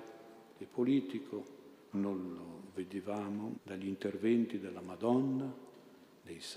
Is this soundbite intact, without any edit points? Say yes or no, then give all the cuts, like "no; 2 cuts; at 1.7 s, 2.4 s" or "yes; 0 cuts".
no; 2 cuts; at 1.9 s, 3.5 s